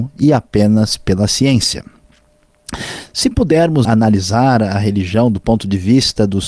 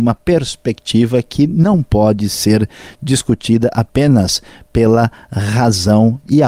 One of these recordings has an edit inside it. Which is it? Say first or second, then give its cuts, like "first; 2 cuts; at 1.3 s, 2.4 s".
first; 1 cut; at 3.8 s